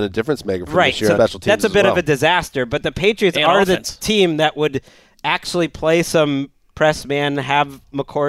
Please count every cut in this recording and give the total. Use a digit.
1